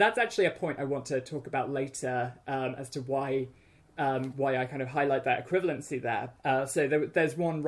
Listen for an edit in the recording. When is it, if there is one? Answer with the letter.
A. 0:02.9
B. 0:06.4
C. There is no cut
B